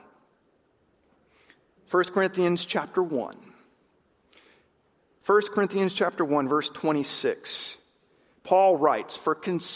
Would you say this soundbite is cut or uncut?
uncut